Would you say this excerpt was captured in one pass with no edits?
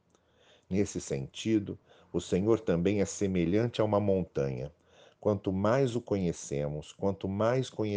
yes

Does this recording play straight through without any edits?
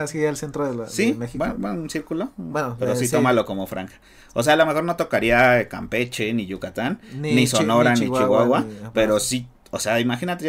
yes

